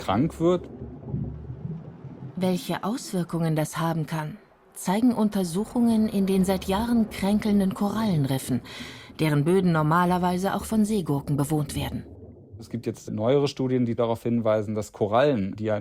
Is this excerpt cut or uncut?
uncut